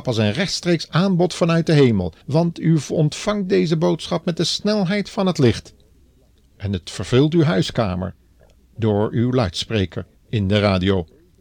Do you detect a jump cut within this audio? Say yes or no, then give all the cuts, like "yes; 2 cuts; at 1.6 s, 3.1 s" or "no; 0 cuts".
yes; 1 cut; at 2.2 s